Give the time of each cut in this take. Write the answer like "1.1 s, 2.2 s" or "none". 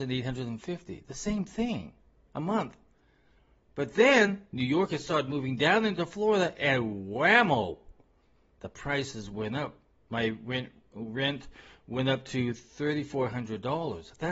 none

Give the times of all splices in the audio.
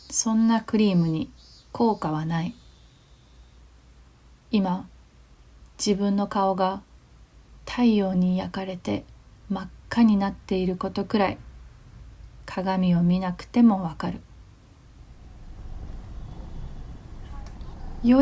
none

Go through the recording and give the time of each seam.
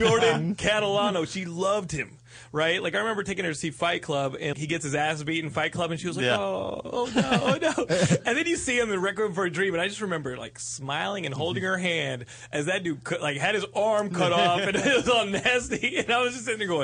4.5 s

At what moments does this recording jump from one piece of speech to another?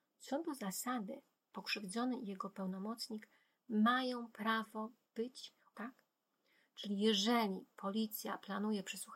5.7 s

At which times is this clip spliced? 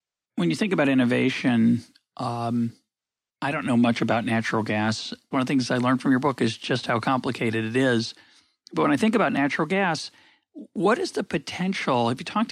5.3 s

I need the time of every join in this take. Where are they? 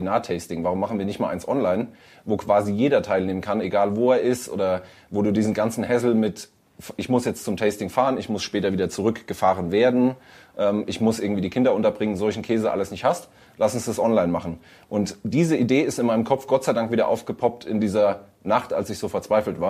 none

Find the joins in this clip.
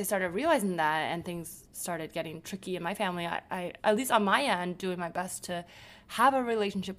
3.8 s

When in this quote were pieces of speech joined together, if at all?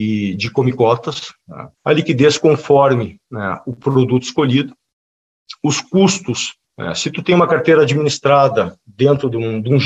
1.7 s, 6.6 s

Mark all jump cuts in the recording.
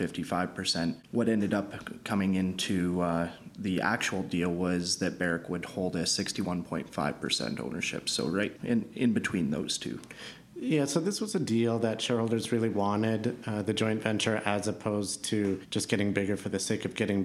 8.6 s

